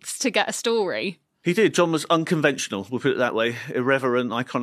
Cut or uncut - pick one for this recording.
uncut